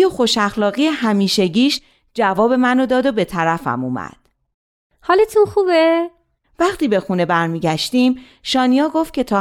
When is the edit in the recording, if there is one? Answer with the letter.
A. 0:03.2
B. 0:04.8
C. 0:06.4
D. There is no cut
C